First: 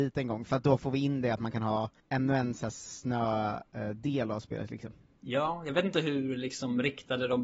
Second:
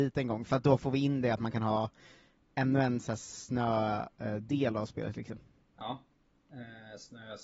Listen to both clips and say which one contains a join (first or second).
first